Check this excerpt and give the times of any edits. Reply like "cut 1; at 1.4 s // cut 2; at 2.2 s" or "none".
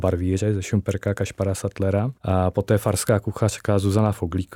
cut 1; at 2.2 s